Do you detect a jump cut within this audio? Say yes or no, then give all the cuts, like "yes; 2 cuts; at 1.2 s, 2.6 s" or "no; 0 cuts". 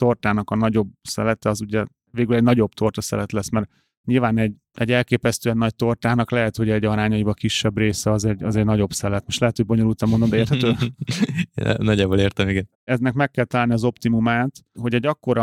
no; 0 cuts